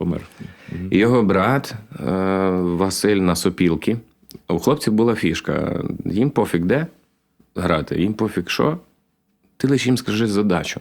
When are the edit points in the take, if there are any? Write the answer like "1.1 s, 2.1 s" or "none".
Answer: none